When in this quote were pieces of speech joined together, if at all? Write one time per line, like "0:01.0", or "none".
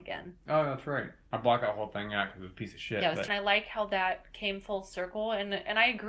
0:03.3